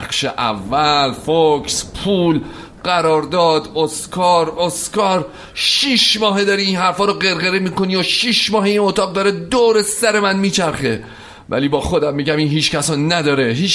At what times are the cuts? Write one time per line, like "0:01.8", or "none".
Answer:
0:04.6